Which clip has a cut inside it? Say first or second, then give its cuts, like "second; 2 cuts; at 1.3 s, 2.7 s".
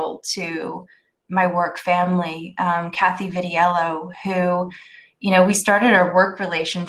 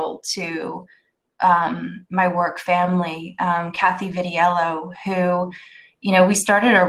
first; 1 cut; at 1.3 s